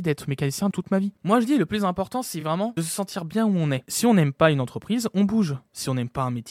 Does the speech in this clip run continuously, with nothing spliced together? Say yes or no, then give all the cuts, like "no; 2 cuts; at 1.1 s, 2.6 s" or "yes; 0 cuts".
yes; 0 cuts